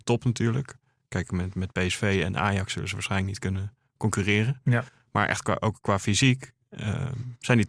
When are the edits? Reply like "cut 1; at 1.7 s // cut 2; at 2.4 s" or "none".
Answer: none